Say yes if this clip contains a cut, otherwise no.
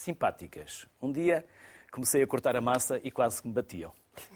no